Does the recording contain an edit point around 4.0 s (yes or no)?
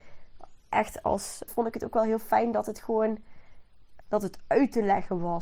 yes